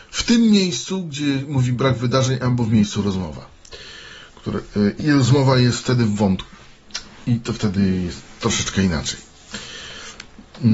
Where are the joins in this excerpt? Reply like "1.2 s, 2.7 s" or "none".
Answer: 5.0 s